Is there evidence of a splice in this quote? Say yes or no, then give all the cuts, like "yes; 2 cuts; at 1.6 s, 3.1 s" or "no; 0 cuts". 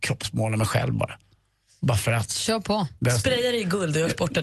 no; 0 cuts